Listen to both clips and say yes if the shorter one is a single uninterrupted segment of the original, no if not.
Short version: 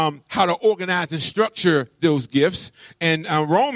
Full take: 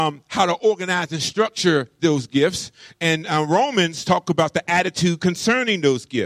yes